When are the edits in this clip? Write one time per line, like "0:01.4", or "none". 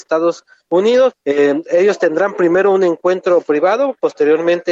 0:01.1